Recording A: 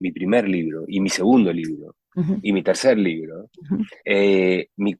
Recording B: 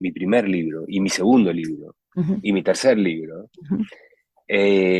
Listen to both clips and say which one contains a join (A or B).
A